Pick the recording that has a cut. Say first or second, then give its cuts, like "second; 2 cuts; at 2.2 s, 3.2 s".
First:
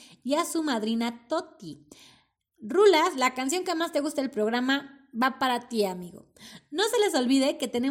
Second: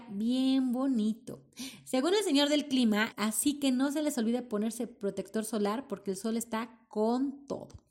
second; 1 cut; at 3.1 s